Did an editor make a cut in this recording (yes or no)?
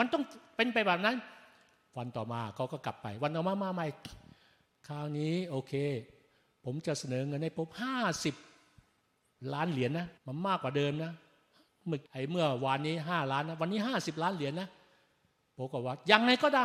yes